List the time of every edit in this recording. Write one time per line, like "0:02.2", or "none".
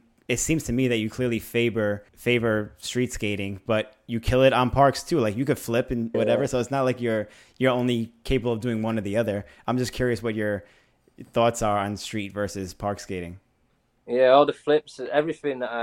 0:02.1
0:06.1